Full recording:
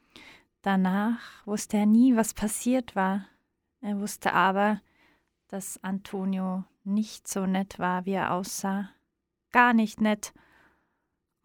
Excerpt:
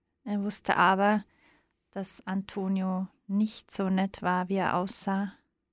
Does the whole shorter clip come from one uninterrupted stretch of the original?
yes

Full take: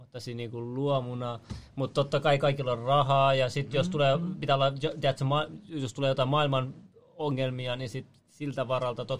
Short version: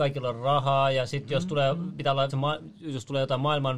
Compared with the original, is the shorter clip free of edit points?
no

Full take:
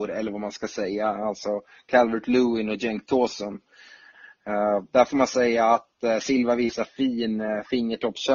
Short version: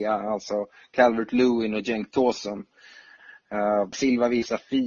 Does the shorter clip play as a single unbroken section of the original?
no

